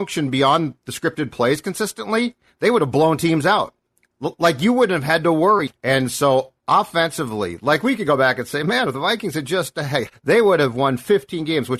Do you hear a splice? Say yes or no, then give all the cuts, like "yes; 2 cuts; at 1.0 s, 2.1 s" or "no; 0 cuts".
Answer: yes; 2 cuts; at 5.7 s, 10.1 s